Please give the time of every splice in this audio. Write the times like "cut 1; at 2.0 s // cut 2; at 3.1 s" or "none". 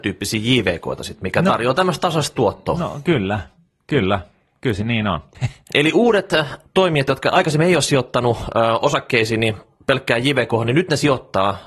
none